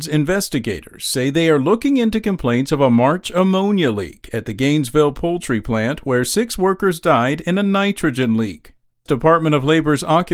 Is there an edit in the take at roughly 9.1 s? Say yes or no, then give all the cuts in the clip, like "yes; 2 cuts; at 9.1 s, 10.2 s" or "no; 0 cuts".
yes; 1 cut; at 9.1 s